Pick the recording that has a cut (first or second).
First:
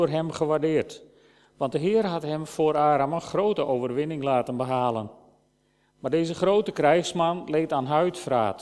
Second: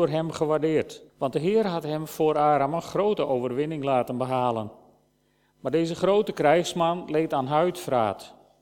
second